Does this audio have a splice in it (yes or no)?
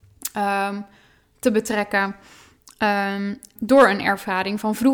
yes